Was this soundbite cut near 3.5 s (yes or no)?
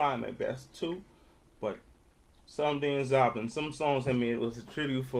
no